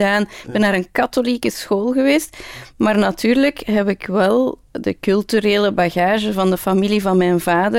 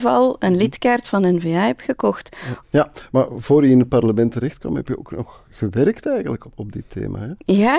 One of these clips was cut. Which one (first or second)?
second